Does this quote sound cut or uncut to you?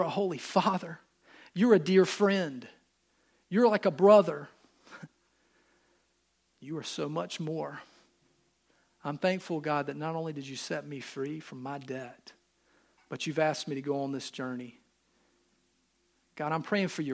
uncut